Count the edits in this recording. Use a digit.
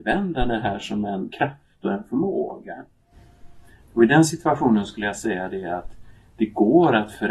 2